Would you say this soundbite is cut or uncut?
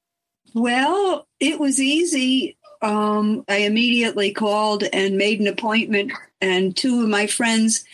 cut